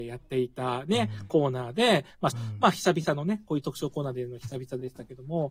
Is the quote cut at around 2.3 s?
yes; 1 cut; at 2.3 s

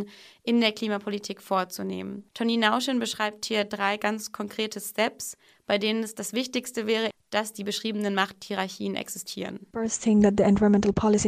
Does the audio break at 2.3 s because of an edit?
no; 1 cut; at 7.1 s

